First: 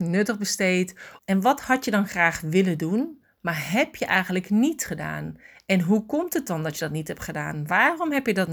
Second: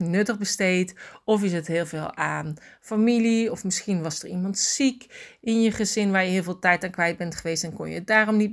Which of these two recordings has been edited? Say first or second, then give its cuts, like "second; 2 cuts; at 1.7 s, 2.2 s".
first; 1 cut; at 1.2 s